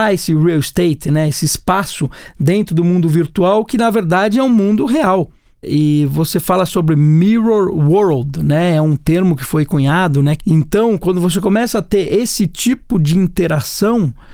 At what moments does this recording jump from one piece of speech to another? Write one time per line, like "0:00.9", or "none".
0:10.4